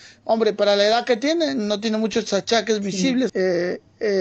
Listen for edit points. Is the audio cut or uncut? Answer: cut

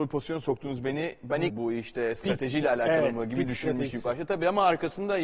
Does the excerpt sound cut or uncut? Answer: cut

